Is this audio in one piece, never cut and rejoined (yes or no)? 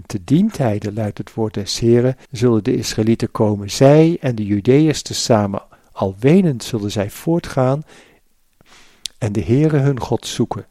no